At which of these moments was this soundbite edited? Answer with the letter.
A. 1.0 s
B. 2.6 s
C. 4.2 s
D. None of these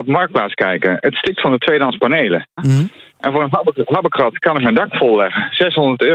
B